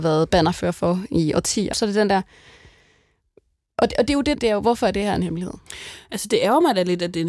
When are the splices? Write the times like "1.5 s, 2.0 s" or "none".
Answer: 1.7 s, 4.3 s